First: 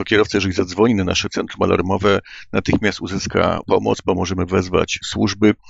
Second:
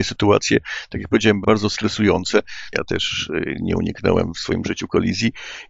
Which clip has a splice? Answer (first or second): second